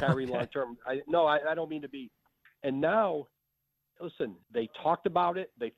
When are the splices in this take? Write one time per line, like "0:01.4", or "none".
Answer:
0:02.5
0:04.4